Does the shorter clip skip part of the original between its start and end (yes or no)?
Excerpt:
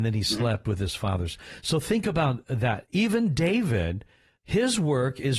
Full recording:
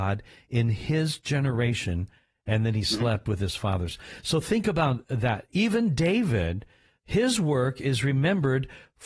no